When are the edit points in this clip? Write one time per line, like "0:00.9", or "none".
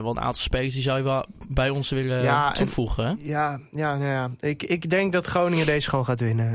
none